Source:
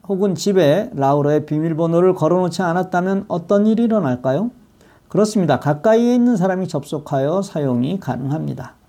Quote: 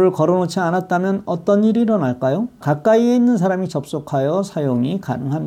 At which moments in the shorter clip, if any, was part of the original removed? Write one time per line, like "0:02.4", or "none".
0:02.6

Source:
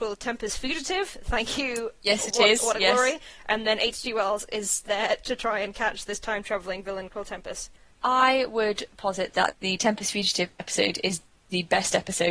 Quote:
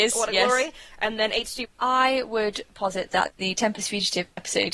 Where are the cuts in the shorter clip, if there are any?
0:01.6

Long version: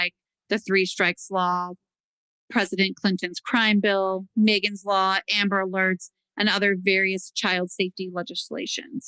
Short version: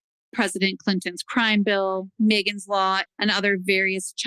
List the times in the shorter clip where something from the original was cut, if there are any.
0:03.1

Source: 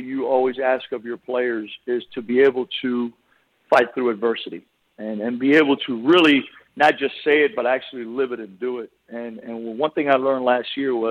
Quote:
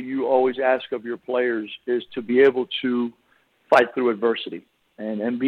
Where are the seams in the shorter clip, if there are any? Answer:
none

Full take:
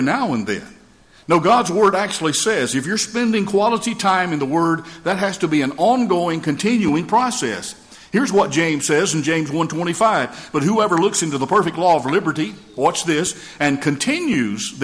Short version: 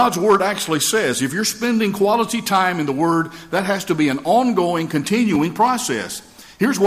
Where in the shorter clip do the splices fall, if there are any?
none

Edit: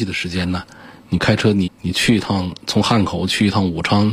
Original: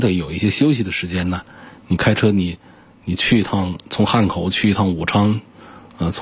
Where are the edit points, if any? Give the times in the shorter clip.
0:01.7

